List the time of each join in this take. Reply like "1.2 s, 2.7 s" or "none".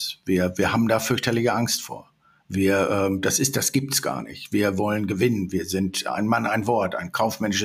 none